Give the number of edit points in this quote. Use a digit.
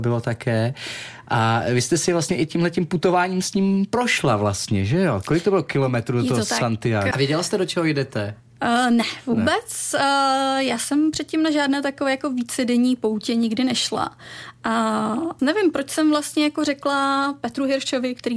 2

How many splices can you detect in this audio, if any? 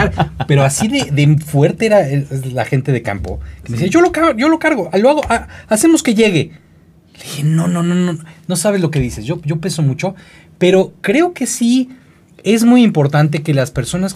0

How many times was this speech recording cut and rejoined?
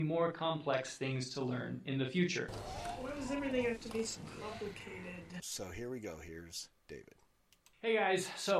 1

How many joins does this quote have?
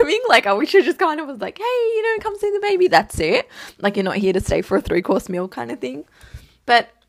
0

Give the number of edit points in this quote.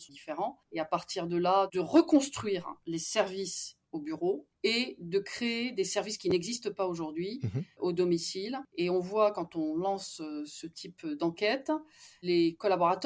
0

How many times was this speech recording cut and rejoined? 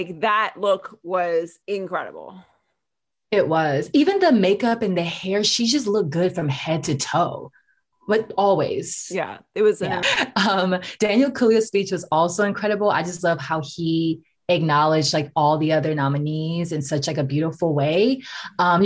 2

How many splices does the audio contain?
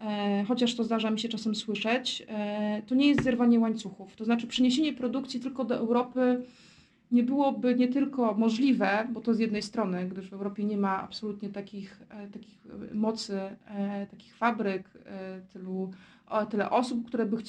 0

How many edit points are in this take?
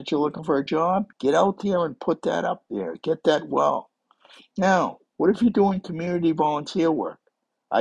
1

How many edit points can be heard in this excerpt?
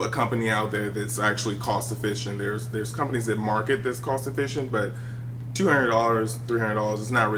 0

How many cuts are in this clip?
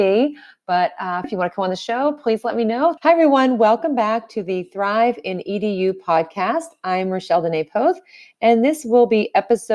2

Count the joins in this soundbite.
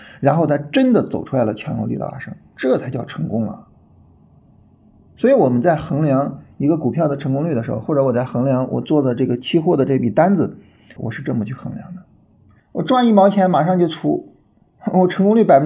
2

